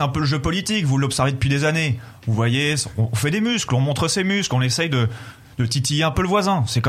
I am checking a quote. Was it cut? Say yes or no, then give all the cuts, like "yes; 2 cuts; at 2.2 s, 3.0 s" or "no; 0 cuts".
no; 0 cuts